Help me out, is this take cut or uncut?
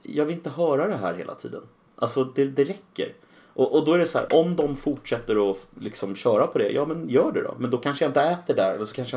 cut